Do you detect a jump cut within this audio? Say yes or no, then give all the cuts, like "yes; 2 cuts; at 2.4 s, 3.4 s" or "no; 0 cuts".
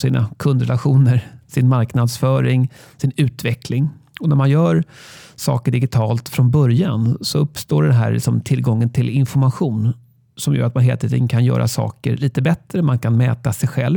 no; 0 cuts